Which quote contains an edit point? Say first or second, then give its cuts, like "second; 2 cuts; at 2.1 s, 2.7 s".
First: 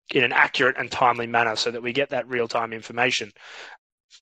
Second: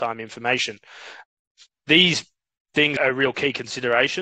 second; 1 cut; at 3.0 s